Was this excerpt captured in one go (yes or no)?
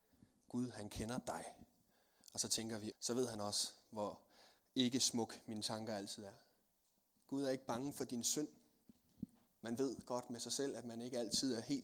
no